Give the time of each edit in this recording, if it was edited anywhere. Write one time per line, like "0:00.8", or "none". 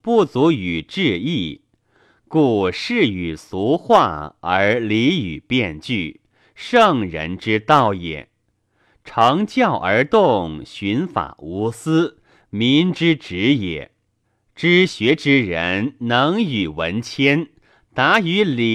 none